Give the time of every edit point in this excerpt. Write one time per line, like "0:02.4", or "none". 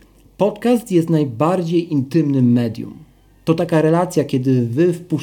none